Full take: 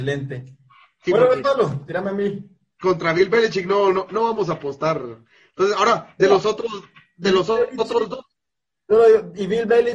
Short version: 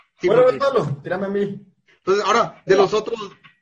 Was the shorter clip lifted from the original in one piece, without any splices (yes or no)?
no